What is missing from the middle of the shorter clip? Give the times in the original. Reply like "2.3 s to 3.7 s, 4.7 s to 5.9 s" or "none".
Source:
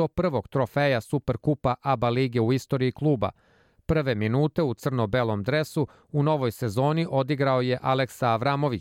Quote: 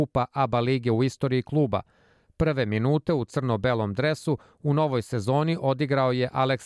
none